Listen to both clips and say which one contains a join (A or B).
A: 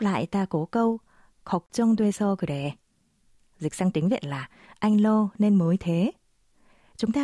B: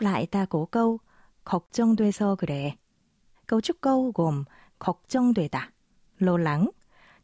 B